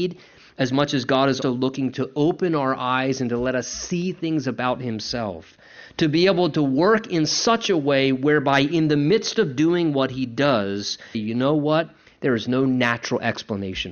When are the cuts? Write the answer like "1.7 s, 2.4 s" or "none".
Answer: 1.4 s, 11.1 s

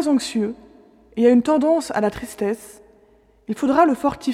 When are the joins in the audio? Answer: none

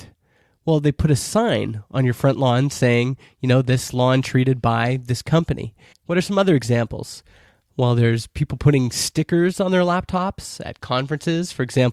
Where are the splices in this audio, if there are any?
5.9 s

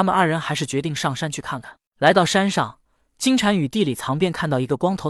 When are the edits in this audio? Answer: none

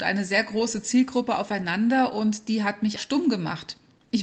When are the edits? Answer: 3.0 s

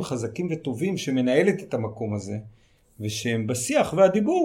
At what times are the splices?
none

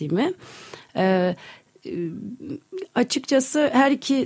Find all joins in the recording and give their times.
none

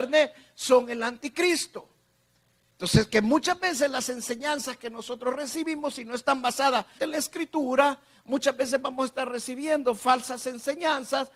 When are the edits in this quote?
2.7 s, 7.0 s

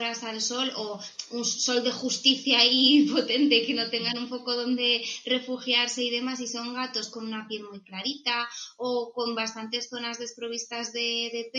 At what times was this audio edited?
none

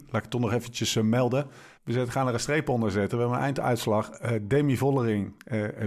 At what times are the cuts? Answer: 1.8 s

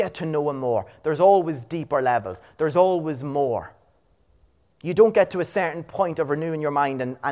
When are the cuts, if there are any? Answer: none

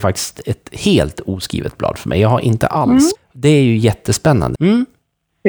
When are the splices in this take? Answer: 3.2 s, 4.6 s

